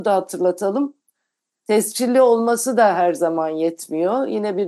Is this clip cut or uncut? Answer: uncut